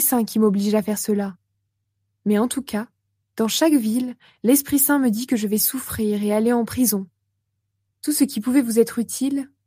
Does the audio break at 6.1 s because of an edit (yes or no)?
no